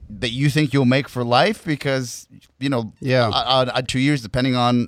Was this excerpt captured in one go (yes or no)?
no